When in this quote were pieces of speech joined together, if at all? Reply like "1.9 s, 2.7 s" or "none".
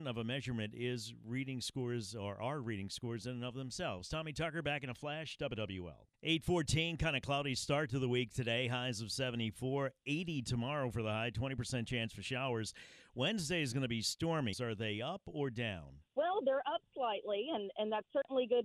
6.1 s, 14.5 s, 16.1 s